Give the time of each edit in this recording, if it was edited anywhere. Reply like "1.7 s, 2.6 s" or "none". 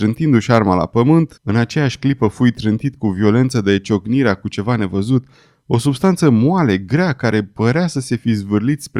1.4 s